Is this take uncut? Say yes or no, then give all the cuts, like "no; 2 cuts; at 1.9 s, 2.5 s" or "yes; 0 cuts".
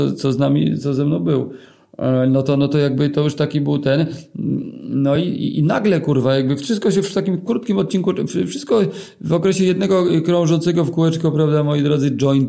yes; 0 cuts